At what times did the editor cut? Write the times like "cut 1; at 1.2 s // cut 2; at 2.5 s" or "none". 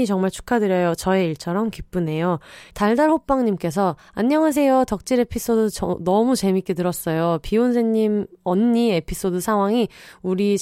cut 1; at 2.7 s

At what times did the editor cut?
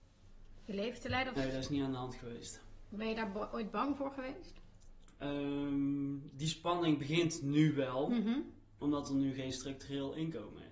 cut 1; at 1.4 s // cut 2; at 5.2 s

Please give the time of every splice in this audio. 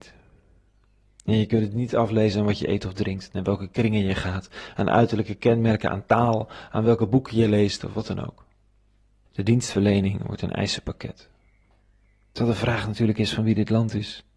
cut 1; at 9.3 s

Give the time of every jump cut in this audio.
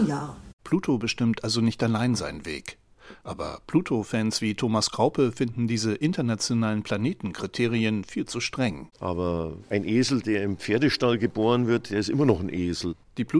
cut 1; at 8.9 s

